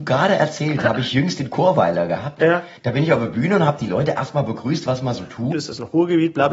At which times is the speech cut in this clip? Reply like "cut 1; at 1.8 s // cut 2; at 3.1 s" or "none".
cut 1; at 2.8 s // cut 2; at 5.5 s